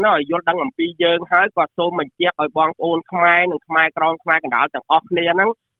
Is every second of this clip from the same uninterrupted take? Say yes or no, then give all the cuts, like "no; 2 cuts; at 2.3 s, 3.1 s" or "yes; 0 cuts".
yes; 0 cuts